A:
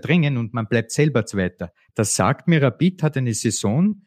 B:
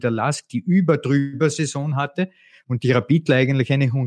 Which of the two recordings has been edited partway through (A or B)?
A